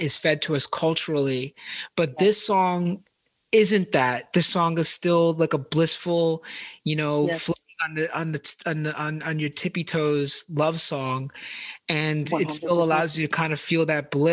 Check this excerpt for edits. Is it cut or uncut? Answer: uncut